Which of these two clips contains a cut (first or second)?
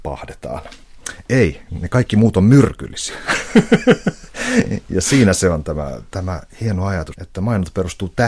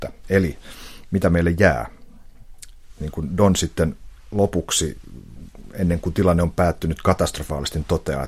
first